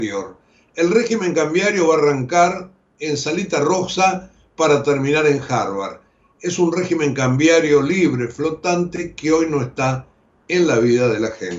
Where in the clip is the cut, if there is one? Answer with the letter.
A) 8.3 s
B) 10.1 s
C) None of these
C